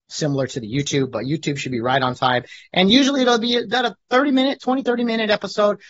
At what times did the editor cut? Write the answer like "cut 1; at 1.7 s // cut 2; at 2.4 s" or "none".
none